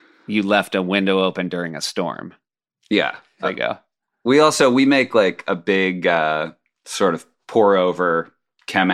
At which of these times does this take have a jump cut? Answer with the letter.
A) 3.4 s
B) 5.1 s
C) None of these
A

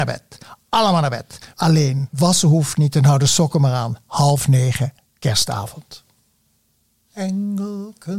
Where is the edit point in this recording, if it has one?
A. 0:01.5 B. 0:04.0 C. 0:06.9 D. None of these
A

